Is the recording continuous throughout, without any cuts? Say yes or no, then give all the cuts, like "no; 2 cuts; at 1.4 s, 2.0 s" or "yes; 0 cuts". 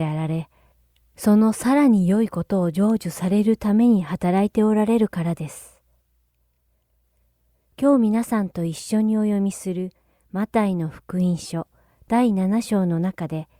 yes; 0 cuts